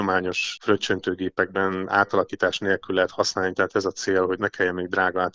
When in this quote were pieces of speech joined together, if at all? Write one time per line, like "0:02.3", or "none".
0:04.4